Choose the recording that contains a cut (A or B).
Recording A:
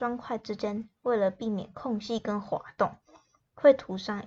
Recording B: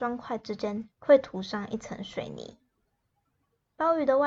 B